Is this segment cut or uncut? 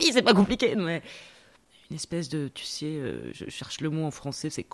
uncut